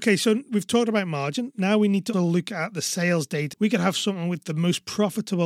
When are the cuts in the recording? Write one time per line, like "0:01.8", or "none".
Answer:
0:02.1
0:03.5